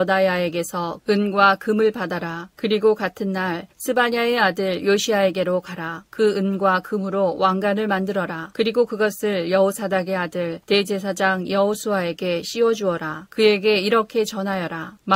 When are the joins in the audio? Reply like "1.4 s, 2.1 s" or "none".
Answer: none